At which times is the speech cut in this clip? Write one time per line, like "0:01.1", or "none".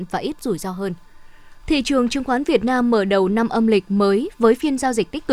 0:01.6